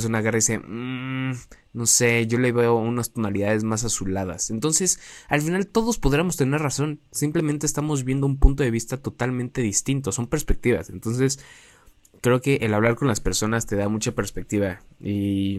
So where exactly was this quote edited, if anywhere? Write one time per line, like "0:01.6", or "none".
none